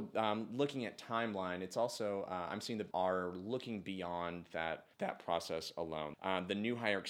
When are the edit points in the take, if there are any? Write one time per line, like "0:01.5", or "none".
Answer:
0:02.9
0:04.9
0:06.1